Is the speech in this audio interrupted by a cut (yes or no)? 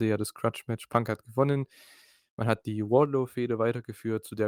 no